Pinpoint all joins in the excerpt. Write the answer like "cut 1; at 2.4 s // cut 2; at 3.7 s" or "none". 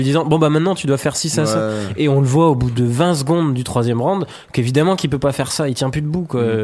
none